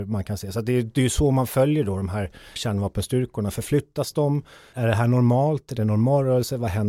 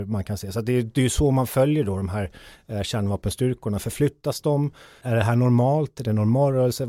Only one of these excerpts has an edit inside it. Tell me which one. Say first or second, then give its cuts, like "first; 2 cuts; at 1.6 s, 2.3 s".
first; 1 cut; at 2.6 s